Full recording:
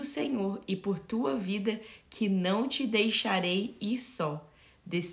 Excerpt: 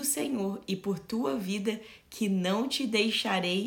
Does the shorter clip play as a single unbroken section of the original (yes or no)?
yes